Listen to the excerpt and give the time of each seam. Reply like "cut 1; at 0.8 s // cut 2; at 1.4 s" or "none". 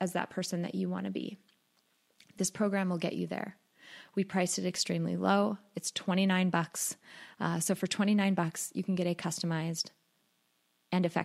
none